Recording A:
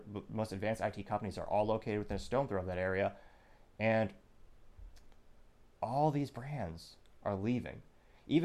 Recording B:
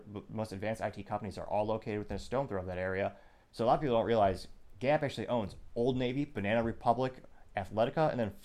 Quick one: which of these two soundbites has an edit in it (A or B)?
B